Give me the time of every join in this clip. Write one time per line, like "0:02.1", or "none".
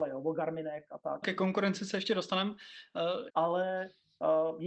0:01.2
0:03.3